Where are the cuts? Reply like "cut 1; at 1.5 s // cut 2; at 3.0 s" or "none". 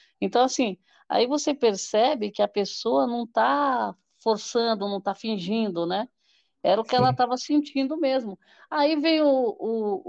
none